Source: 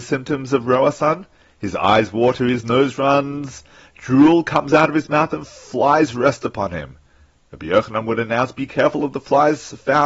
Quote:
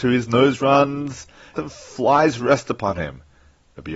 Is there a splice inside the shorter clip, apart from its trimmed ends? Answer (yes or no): yes